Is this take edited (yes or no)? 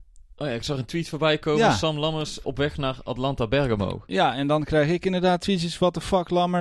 yes